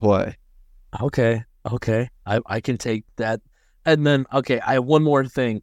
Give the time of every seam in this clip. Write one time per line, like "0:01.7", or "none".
none